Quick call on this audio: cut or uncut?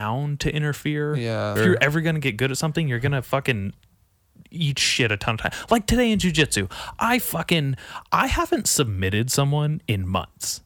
cut